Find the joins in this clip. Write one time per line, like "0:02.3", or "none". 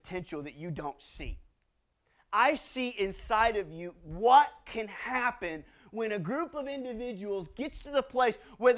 none